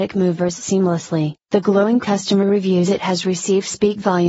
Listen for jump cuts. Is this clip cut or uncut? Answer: cut